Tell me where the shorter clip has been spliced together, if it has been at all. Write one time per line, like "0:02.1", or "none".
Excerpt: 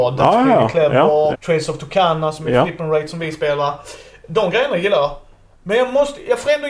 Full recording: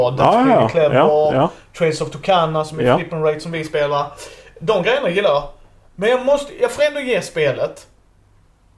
0:01.3

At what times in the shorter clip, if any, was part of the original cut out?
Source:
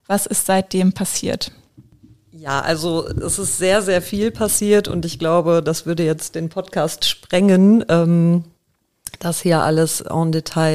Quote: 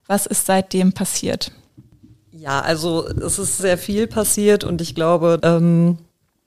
0:03.6
0:05.4

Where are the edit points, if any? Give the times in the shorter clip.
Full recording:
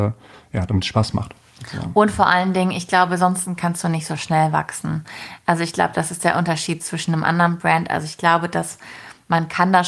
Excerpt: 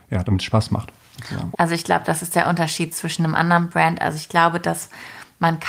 0:01.5

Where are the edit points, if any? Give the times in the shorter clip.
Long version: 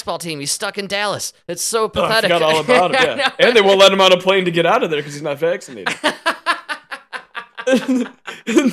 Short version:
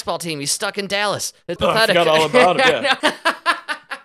0:01.6
0:03.0

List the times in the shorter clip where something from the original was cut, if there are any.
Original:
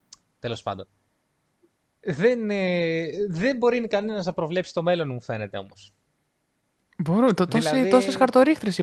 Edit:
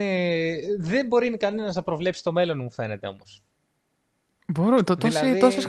none

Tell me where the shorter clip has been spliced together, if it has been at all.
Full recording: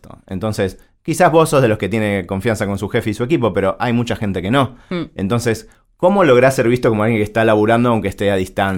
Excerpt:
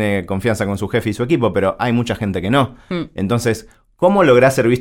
none

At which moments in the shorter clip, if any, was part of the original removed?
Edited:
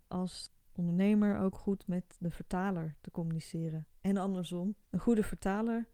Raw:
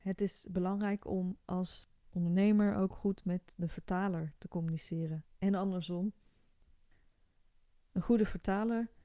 0:04.8

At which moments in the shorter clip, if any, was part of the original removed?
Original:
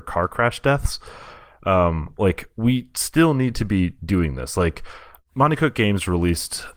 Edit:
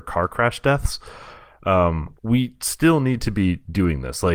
0:02.2

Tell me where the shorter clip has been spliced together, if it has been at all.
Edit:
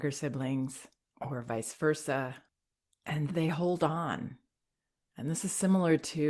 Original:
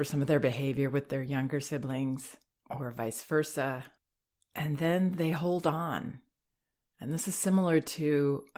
0:03.3

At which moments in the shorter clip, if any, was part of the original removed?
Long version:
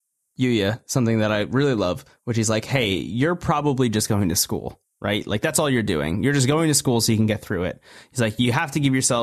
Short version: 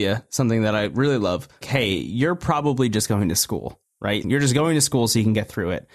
0:01.6
0:04.2

